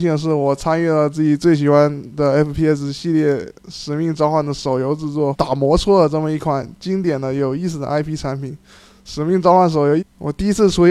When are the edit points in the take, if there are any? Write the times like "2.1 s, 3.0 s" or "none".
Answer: 5.3 s, 10.0 s